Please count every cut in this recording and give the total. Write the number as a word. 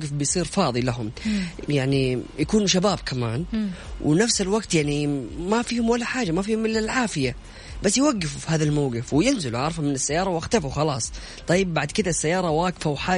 one